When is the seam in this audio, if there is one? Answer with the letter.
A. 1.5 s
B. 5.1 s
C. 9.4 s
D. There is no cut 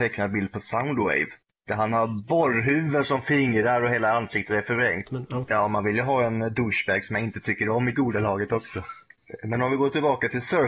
B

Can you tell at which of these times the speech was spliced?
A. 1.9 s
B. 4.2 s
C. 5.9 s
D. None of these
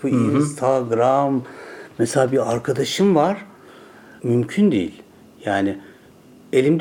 B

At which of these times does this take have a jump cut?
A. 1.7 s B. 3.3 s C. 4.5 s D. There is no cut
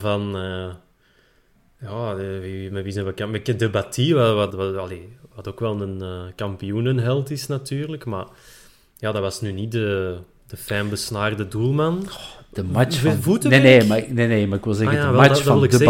C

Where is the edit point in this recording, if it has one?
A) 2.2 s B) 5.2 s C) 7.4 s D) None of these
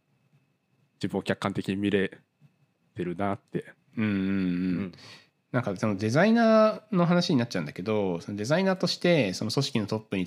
D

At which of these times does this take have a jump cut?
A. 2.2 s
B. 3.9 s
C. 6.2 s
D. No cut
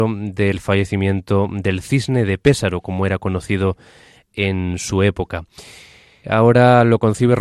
C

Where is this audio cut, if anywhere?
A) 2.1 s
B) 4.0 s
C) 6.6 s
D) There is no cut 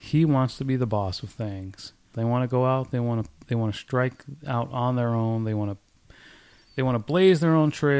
A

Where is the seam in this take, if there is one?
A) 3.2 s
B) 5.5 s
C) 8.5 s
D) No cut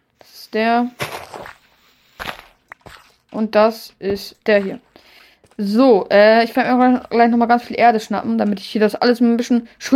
D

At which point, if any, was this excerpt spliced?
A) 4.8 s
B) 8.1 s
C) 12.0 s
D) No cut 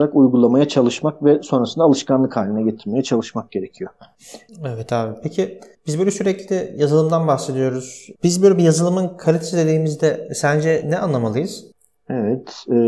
B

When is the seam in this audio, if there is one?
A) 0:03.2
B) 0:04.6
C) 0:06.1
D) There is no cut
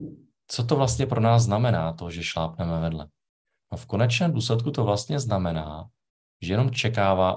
D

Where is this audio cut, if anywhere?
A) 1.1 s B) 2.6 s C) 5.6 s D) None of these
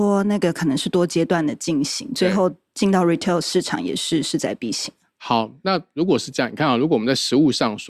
D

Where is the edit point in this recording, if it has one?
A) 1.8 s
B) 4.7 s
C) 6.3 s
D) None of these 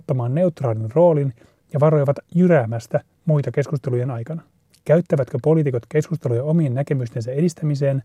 B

